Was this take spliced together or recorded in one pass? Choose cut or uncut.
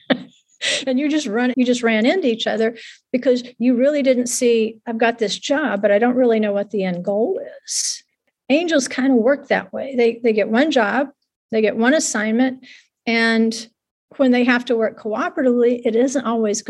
cut